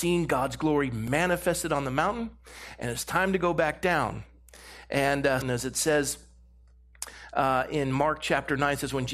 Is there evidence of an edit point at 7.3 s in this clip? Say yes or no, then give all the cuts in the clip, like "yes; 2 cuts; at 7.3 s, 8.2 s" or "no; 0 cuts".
no; 1 cut; at 5.4 s